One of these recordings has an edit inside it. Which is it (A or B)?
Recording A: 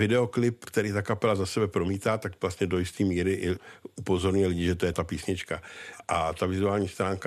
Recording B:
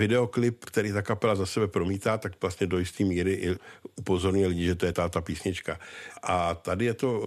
A